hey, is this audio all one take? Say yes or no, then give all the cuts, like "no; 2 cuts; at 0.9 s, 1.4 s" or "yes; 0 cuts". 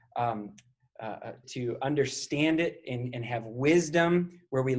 no; 1 cut; at 1.4 s